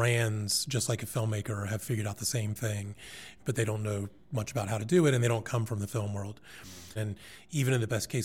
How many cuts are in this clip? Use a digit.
2